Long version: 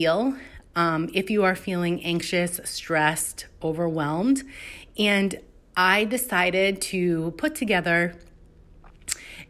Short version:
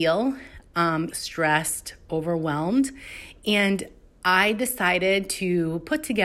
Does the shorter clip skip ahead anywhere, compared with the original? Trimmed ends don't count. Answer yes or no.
yes